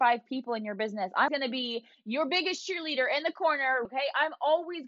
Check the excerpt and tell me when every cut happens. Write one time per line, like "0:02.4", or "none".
0:01.3
0:03.9